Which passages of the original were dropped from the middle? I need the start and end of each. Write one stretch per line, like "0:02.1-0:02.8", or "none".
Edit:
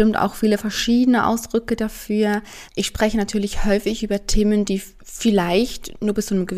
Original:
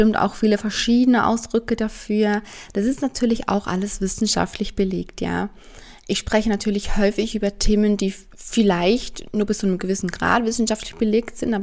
0:02.7-0:06.0